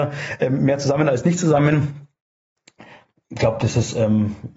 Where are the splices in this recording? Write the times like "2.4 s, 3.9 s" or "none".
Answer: none